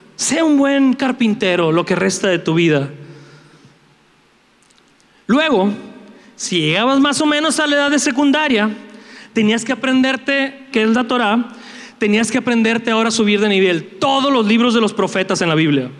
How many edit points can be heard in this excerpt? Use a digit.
1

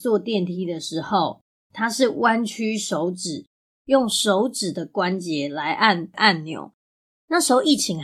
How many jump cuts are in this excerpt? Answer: 0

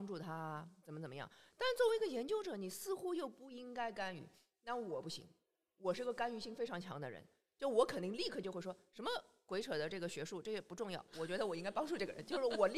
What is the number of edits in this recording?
0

